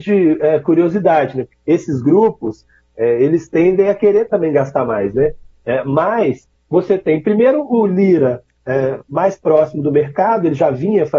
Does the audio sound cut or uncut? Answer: cut